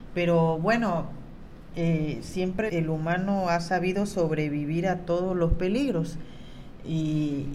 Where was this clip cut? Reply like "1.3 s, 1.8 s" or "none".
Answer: 2.7 s